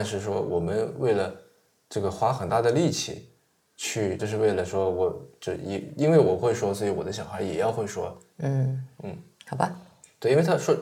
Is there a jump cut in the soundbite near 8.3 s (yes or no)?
yes